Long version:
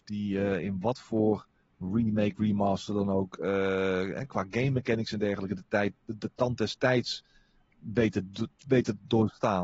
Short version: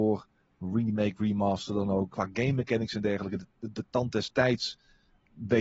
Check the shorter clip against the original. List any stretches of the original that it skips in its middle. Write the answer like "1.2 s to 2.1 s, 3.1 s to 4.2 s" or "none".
3.3 s to 4.3 s, 5.7 s to 6.0 s